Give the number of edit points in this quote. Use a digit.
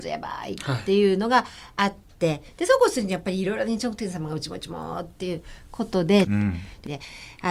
1